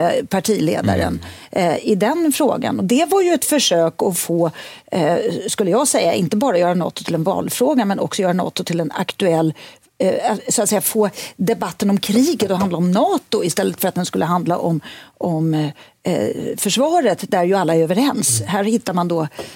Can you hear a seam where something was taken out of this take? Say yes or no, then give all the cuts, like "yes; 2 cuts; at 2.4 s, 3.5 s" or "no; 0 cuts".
no; 0 cuts